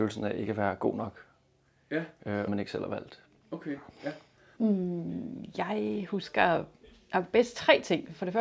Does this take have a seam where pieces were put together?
yes; 2 cuts; at 2.5 s, 4.6 s

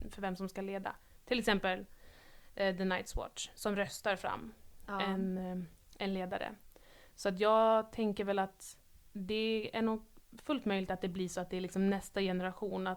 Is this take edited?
no; 0 cuts

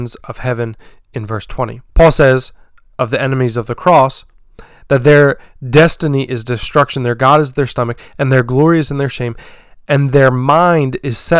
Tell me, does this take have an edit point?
yes; 1 cut; at 1.9 s

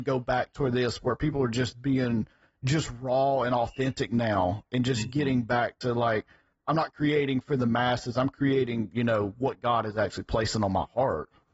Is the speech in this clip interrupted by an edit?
no; 0 cuts

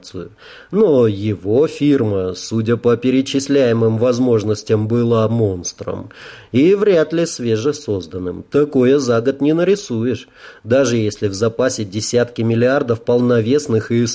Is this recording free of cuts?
no; 1 cut; at 5.3 s

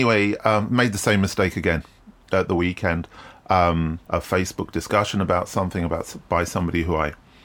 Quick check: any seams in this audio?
yes; 1 cut; at 4.1 s

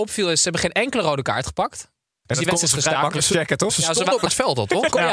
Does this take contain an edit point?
yes; 1 cut; at 2.3 s

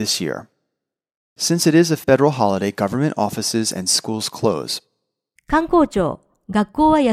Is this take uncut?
no; 1 cut; at 5.4 s

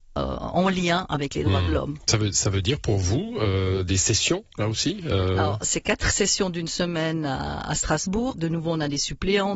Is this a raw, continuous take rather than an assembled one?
no; 1 cut; at 8.3 s

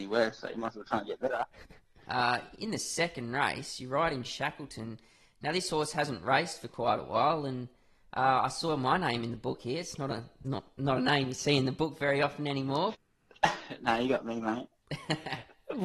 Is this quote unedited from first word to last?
no; 2 cuts; at 2.1 s, 12.9 s

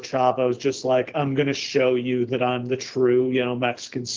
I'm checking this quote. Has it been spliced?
no; 0 cuts

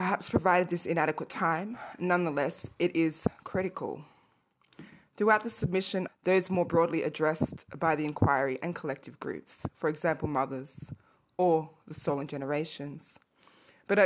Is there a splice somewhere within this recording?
yes; 1 cut; at 6.1 s

